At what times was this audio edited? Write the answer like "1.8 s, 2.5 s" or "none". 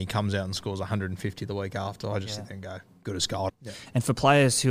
3.5 s